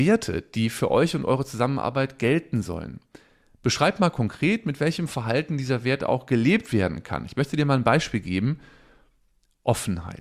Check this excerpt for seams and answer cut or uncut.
uncut